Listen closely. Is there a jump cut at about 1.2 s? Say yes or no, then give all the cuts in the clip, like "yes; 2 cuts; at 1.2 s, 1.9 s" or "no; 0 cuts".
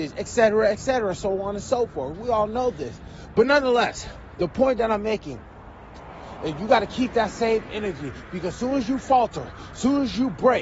no; 1 cut; at 3.3 s